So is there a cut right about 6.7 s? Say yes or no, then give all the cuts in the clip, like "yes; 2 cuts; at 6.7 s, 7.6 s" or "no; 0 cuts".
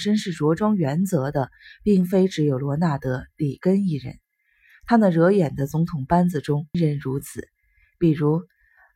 yes; 1 cut; at 6.7 s